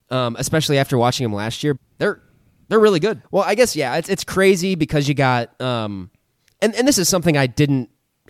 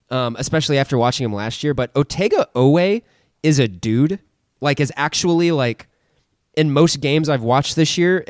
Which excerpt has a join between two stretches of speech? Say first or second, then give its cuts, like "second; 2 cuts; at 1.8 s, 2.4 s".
first; 2 cuts; at 1.8 s, 3.2 s